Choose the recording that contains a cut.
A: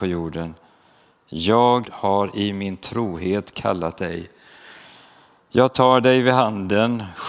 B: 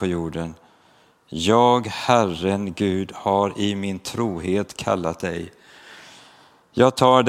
A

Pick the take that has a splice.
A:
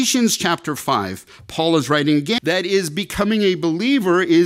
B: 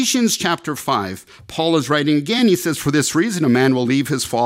A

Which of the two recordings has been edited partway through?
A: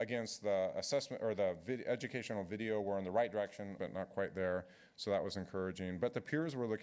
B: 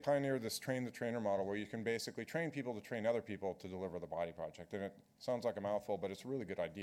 A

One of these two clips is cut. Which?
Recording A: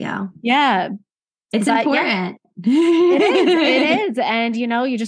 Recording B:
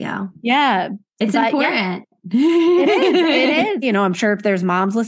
B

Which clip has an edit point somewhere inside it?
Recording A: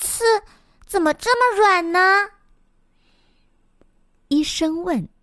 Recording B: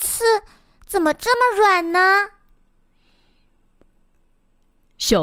A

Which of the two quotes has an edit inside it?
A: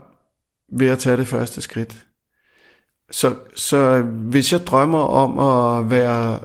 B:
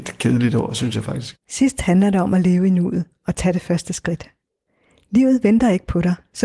B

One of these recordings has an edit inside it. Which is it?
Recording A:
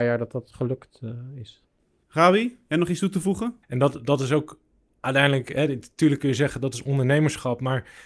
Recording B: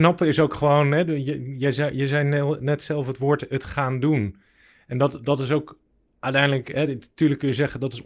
A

